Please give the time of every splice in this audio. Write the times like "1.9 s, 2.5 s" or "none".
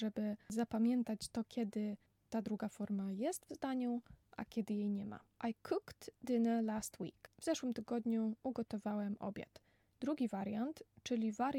5.3 s, 9.9 s